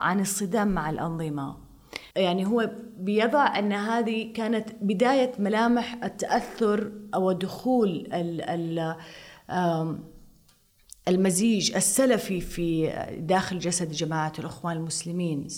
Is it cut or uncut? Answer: cut